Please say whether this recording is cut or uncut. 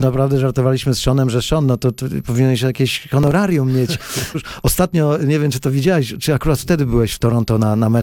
cut